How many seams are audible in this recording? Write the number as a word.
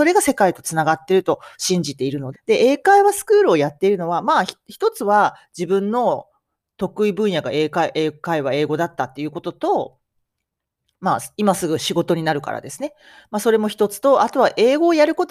one